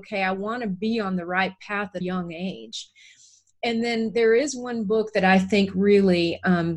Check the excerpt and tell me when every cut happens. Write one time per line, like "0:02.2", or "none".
0:02.0